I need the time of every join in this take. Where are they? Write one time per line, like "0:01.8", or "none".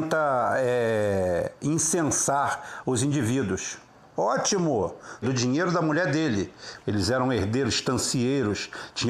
0:04.1
0:05.2
0:06.8